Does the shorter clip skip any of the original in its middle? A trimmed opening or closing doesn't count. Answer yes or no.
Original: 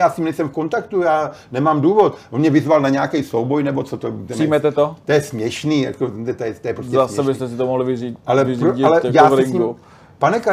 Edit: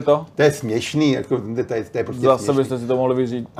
no